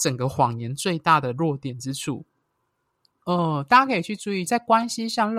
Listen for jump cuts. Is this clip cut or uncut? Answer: cut